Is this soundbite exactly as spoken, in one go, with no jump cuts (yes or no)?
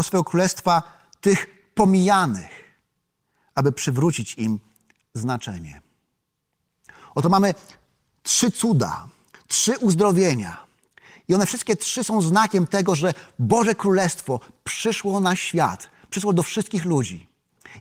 yes